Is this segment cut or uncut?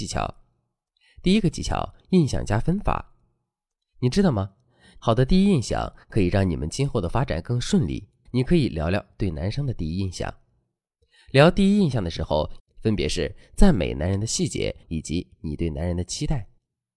cut